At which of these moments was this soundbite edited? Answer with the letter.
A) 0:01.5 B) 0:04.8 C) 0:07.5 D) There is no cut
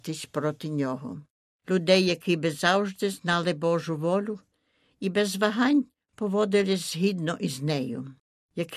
A